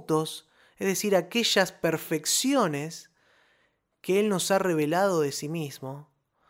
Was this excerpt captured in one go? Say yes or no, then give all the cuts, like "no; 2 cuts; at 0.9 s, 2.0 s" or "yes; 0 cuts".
yes; 0 cuts